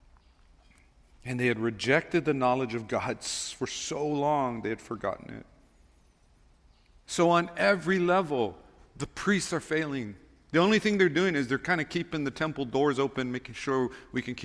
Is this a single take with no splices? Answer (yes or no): yes